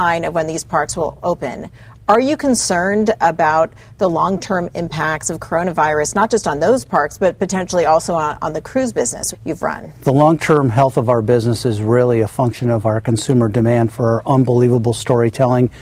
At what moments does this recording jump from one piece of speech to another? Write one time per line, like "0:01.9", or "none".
0:09.3